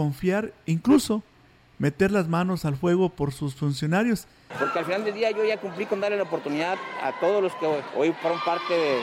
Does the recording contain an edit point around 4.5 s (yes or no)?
yes